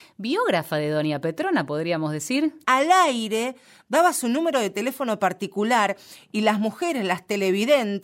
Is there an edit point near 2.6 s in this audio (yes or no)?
yes